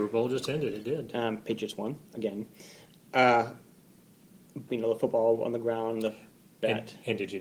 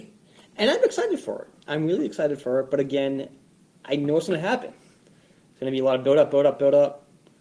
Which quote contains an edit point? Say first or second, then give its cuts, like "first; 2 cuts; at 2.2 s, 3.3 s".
first; 1 cut; at 4.7 s